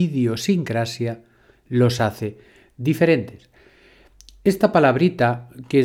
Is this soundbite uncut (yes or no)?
yes